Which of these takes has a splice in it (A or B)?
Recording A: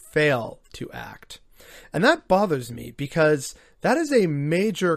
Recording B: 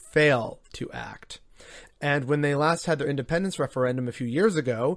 B